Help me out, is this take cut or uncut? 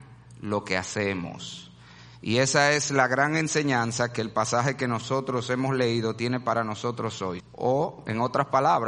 cut